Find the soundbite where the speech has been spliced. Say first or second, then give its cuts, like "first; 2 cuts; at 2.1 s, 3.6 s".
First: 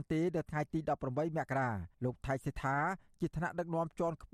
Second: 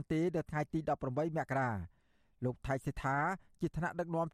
first; 1 cut; at 1.9 s